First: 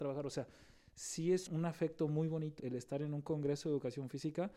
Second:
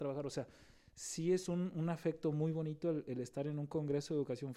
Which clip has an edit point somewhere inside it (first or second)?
first